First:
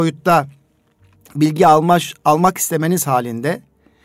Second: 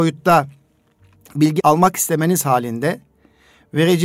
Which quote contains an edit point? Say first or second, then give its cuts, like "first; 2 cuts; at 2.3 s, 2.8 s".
second; 1 cut; at 1.6 s